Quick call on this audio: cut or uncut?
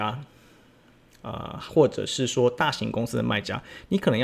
uncut